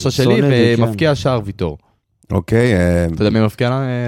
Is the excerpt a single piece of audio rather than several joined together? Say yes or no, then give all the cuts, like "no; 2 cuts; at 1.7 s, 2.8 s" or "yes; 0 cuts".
yes; 0 cuts